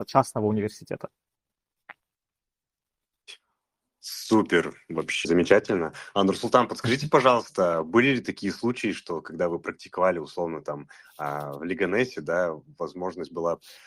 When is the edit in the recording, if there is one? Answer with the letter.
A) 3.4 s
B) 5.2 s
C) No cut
B